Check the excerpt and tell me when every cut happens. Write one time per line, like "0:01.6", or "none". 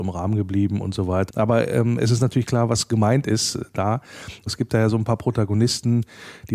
0:01.3
0:04.5